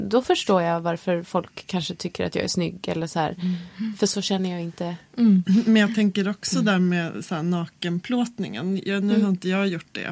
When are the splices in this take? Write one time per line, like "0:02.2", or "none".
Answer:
0:05.4